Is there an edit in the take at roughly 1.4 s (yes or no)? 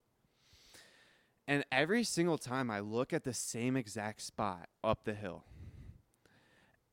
no